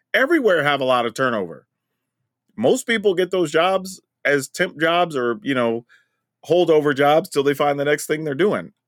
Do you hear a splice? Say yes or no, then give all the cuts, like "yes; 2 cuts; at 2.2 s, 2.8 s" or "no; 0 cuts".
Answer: no; 0 cuts